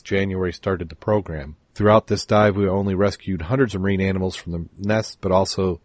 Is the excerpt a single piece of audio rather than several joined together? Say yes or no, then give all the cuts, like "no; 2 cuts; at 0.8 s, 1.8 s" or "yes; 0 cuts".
no; 1 cut; at 1.7 s